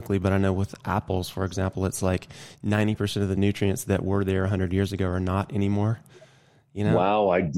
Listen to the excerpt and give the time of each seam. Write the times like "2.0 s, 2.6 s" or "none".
none